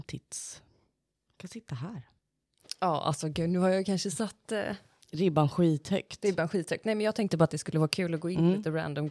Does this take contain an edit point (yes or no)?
no